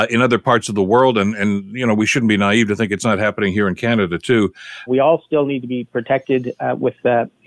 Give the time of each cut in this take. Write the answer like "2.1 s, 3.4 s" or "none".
4.9 s